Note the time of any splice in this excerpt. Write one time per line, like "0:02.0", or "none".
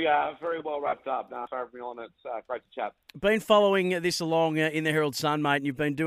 0:01.5